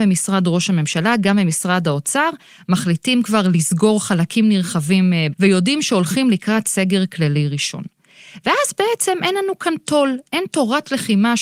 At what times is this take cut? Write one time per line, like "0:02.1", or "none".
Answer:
0:05.3